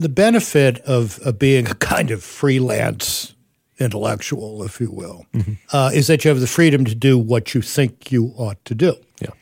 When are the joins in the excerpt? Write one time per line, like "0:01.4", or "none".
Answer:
0:05.6